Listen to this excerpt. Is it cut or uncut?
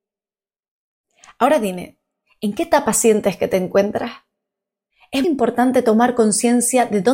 cut